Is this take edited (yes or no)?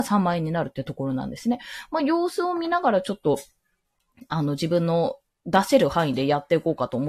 no